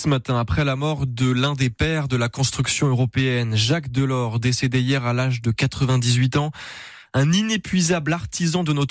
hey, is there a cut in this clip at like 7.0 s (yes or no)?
yes